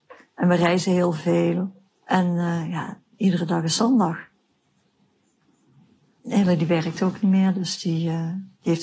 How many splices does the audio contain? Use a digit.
1